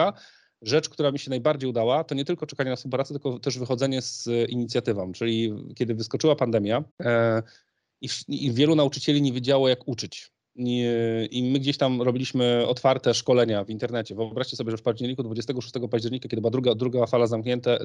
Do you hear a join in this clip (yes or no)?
yes